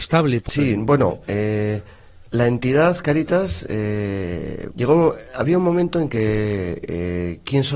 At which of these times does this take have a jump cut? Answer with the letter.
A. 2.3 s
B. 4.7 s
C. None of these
B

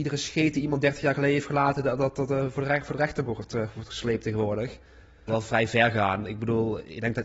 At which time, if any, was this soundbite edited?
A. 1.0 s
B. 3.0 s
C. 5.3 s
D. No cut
C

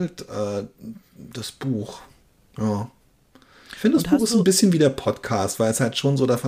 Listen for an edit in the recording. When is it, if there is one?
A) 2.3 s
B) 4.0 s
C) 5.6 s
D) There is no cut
D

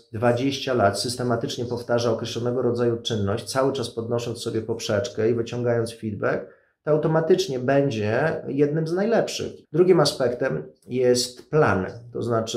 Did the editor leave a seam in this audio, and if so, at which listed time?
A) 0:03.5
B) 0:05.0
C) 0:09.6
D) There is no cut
C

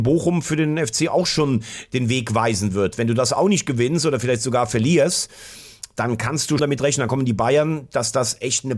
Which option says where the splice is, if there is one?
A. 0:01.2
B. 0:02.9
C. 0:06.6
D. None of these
C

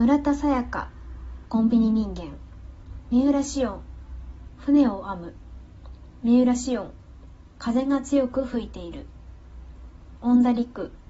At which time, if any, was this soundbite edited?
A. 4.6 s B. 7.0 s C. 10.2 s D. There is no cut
C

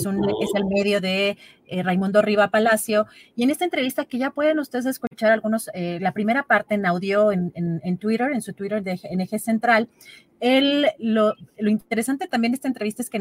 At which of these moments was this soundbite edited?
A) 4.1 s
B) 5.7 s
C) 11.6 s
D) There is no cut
D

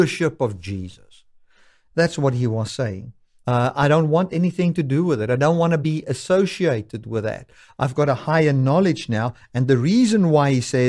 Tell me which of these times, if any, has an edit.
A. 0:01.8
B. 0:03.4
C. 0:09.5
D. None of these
B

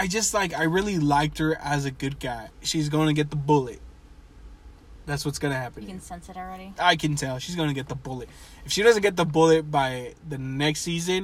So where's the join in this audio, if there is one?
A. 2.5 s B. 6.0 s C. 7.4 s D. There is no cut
A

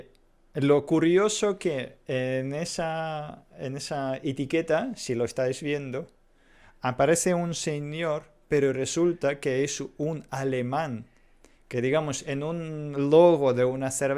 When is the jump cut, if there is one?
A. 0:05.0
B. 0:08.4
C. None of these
C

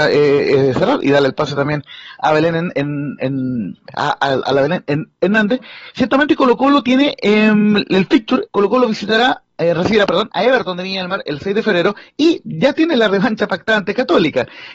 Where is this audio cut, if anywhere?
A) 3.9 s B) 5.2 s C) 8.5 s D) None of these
C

